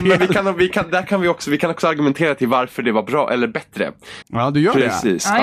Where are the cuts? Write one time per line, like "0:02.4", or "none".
0:04.2

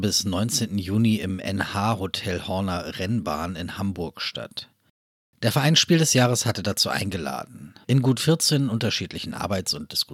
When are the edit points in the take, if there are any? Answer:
0:07.8

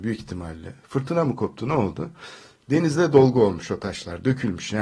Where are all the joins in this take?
none

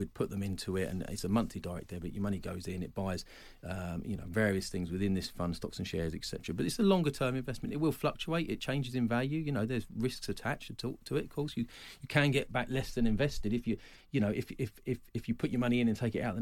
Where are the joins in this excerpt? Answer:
none

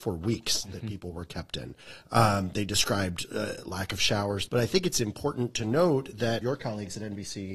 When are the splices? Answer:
0:04.5
0:06.4

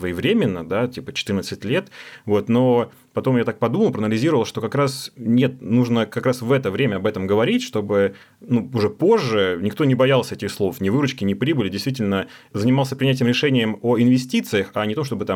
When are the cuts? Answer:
none

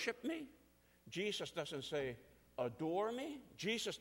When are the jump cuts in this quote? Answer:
none

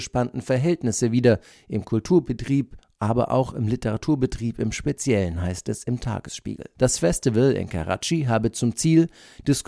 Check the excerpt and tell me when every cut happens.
0:06.8

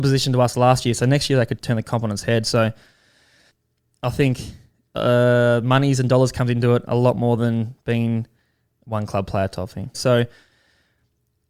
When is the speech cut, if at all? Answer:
0:01.6
0:09.9

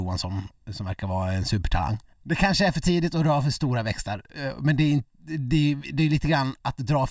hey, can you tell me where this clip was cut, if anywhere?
0:02.1

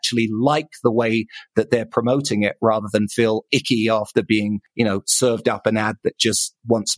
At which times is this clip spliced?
none

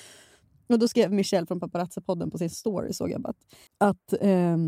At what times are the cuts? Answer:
0:03.7

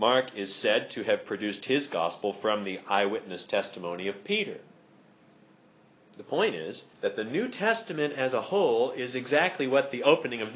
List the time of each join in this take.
0:06.9

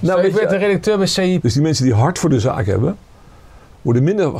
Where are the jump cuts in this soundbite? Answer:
0:01.4

